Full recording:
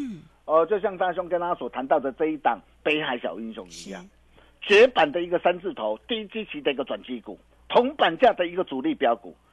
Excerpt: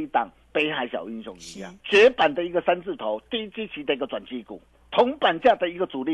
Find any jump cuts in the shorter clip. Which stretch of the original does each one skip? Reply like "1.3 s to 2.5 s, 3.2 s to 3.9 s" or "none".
4.1 s to 4.6 s